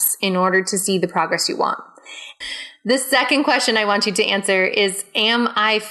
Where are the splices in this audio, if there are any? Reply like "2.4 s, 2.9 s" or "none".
2.4 s